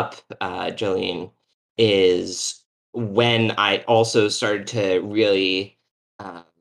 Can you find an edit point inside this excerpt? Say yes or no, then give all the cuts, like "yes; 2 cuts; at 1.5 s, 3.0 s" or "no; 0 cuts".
no; 0 cuts